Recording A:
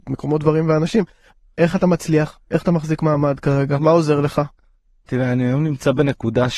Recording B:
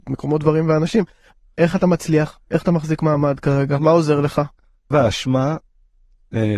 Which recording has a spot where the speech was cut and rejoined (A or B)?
B